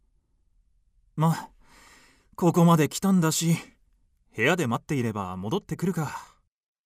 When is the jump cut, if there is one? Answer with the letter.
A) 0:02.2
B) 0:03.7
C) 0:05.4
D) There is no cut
D